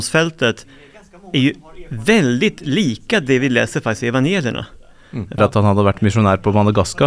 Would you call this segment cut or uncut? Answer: cut